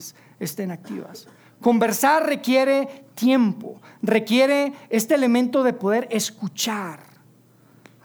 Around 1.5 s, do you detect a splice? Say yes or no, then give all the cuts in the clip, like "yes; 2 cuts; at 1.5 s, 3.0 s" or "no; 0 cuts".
no; 0 cuts